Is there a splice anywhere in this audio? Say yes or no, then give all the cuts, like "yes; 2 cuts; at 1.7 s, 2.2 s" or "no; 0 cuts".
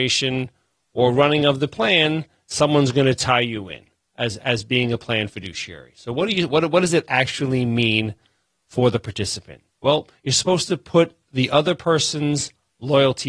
no; 0 cuts